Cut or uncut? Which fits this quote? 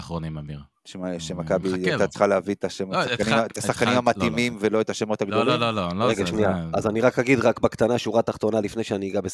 uncut